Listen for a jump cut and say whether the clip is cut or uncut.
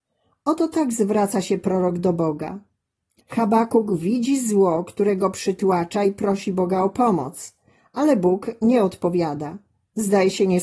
cut